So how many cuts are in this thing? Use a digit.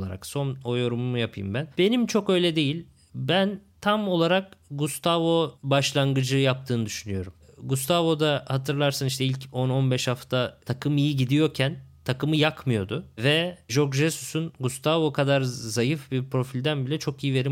1